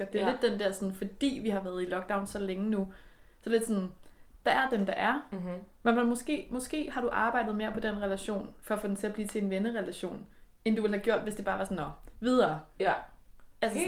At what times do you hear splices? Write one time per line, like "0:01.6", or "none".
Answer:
none